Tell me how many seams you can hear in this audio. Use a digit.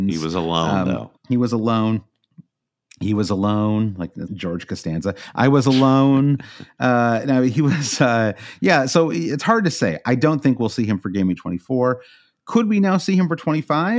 2